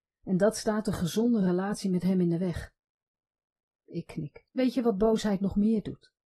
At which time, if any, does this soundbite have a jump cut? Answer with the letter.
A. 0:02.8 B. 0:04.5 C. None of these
B